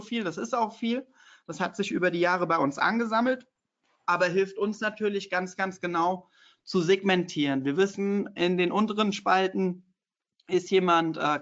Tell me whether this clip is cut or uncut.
uncut